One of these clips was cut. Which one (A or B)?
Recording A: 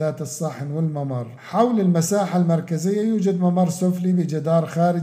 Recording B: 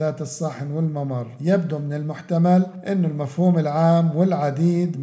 A